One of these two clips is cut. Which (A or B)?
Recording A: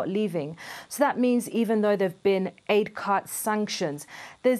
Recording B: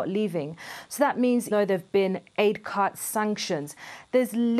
B